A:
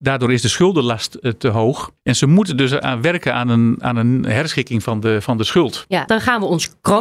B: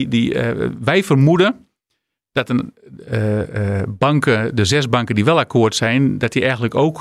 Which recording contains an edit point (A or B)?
A